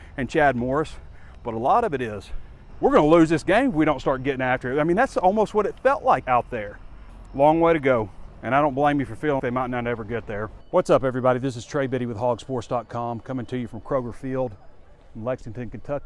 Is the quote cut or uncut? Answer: cut